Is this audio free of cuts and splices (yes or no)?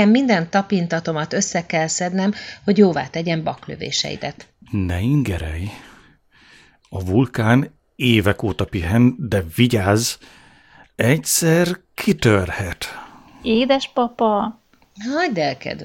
yes